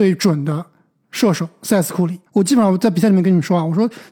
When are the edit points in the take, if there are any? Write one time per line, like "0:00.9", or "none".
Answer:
0:02.3